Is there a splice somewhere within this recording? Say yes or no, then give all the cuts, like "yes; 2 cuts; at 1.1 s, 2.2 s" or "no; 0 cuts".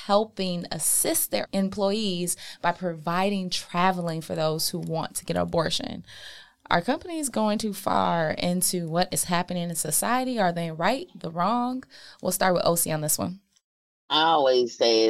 no; 0 cuts